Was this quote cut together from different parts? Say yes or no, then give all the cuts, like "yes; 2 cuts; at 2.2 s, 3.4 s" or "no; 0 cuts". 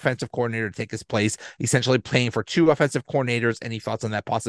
no; 0 cuts